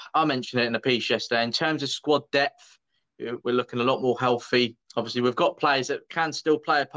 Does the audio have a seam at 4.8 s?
yes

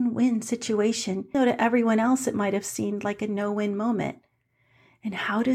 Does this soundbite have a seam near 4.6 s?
no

